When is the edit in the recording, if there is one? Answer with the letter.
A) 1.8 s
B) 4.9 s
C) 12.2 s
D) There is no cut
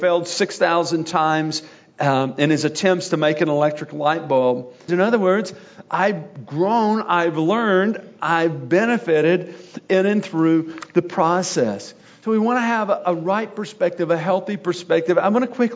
B